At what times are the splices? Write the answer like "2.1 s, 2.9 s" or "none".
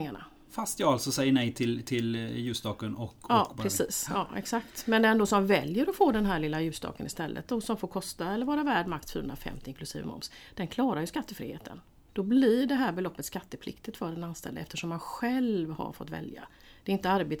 12.1 s

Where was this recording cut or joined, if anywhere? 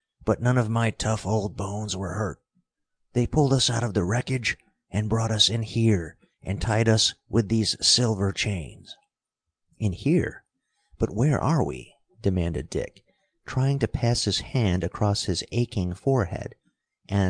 none

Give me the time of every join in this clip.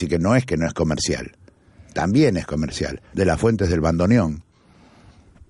3.1 s

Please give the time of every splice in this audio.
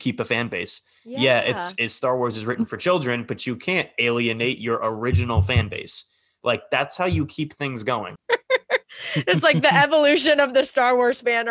8.2 s

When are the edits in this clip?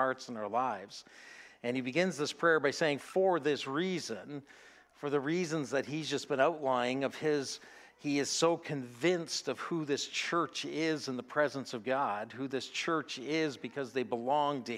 none

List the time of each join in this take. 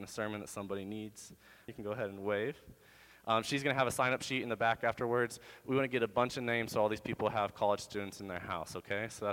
1.7 s

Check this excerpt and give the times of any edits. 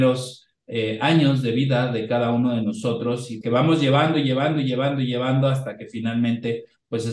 3.4 s

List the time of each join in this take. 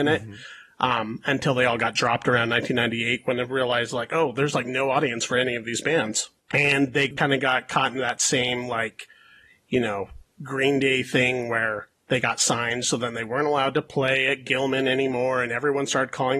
none

